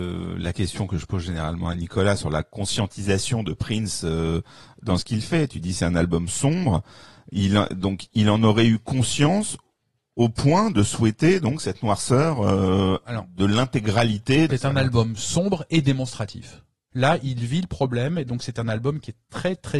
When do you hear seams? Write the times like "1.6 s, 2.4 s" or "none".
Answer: 14.5 s, 16.9 s